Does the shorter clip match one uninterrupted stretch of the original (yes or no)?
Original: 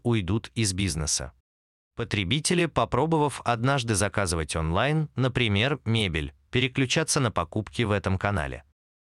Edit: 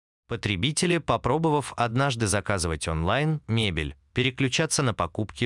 no